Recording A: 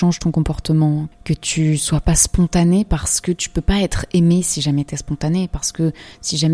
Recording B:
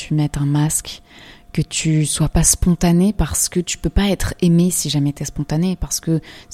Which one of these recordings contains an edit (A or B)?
A